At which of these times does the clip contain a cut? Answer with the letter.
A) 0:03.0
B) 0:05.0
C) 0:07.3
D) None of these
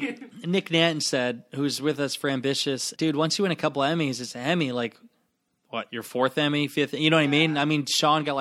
A